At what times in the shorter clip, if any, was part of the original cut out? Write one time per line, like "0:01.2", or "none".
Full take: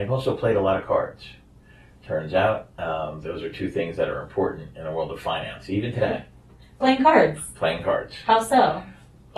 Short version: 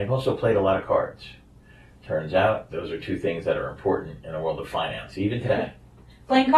0:02.7